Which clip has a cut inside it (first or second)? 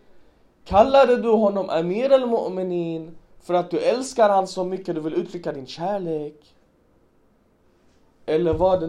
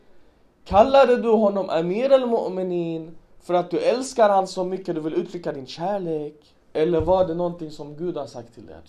second